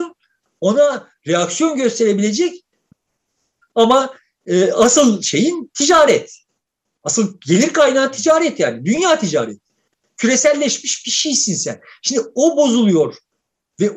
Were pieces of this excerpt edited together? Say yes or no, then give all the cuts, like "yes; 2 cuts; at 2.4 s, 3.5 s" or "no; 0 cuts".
no; 0 cuts